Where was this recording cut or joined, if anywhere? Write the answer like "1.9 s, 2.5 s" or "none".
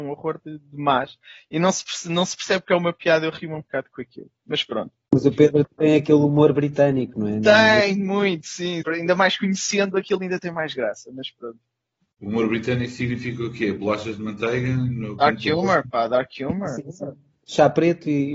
8.8 s